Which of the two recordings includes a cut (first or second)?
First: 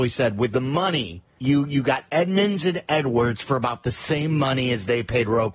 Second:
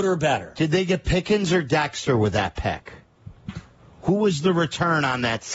first